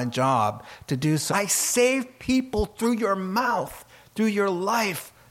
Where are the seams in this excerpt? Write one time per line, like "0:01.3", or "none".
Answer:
0:01.3